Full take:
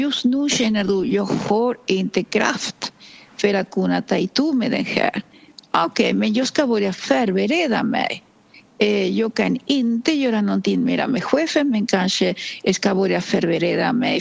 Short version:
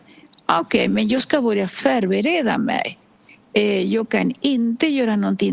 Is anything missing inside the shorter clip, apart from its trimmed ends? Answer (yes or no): no